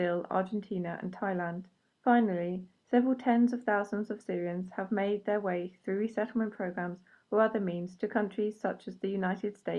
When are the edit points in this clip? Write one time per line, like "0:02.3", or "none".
0:01.9